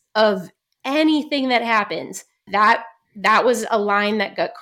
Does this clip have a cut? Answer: yes; 1 cut; at 2.5 s

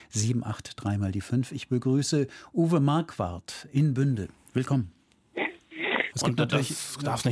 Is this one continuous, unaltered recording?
no; 1 cut; at 6.1 s

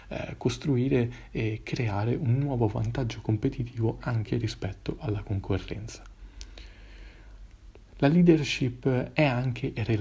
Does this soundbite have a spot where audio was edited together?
yes; 1 cut; at 7.8 s

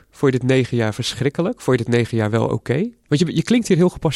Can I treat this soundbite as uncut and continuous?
yes; 0 cuts

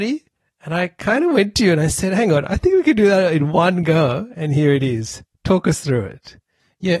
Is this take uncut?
yes; 0 cuts

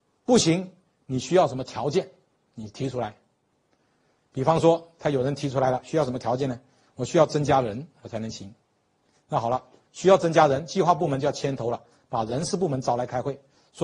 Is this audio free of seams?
yes; 0 cuts

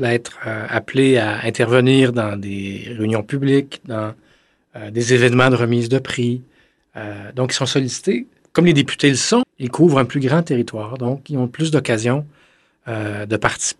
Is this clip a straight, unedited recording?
no; 2 cuts; at 8.4 s, 9.4 s

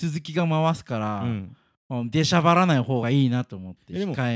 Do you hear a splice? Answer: no; 0 cuts

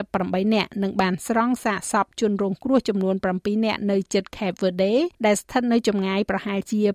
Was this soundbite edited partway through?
yes; 1 cut; at 5.1 s

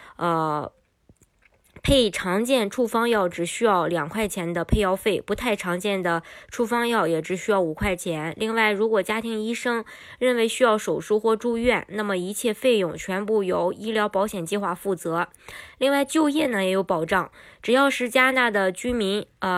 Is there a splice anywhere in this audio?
no; 0 cuts

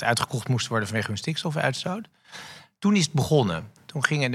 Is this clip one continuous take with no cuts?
yes; 0 cuts

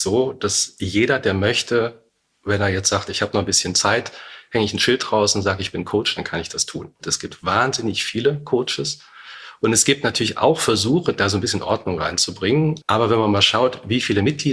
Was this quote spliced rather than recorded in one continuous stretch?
yes; 2 cuts; at 7.0 s, 12.8 s

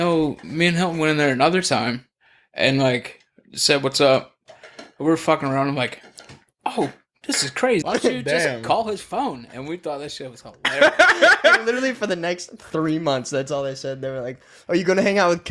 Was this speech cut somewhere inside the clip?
yes; 1 cut; at 7.8 s

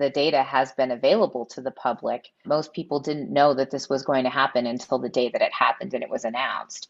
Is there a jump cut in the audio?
yes; 1 cut; at 2.4 s

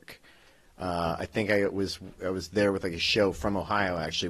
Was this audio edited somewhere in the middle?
no; 0 cuts

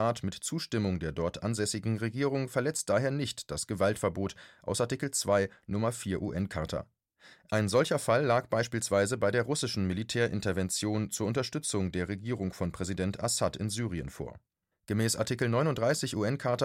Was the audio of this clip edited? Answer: yes; 1 cut; at 14.7 s

